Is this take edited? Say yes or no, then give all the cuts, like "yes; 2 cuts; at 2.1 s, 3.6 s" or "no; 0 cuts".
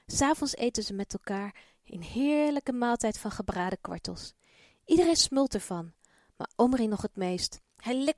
no; 0 cuts